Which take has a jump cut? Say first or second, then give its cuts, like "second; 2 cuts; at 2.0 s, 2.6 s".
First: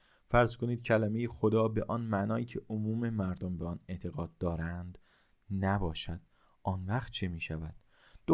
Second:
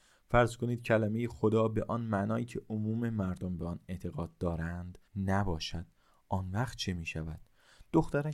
second; 1 cut; at 5.1 s